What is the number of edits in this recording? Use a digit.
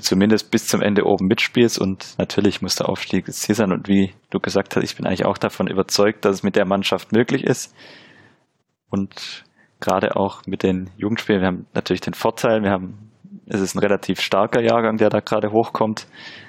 0